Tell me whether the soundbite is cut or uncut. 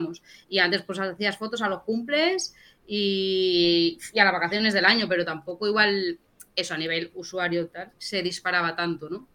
uncut